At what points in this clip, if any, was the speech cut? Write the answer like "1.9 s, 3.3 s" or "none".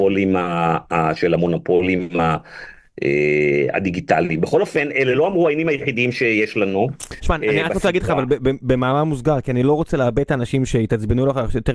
none